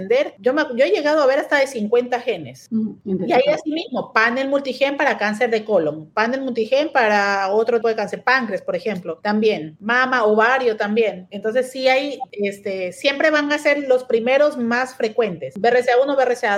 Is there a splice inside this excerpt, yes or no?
yes